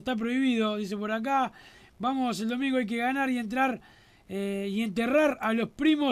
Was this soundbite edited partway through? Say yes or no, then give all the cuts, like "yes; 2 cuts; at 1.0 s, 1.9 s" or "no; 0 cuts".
no; 0 cuts